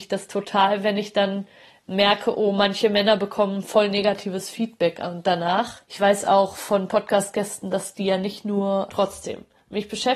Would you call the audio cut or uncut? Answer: cut